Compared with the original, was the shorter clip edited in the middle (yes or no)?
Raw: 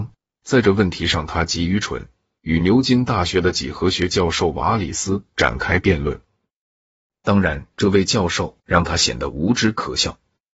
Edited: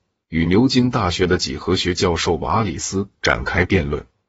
no